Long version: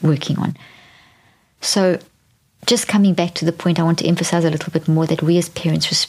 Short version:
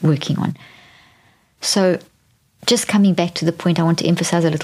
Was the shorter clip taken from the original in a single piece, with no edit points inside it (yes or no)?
yes